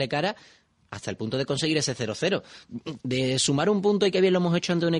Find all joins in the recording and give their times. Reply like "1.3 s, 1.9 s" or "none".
3.0 s